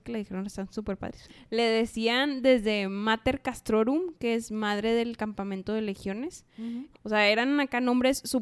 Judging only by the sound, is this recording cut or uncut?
cut